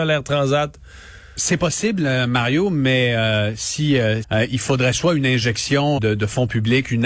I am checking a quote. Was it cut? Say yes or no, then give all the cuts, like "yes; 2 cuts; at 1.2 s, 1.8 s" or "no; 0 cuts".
yes; 2 cuts; at 4.2 s, 6.0 s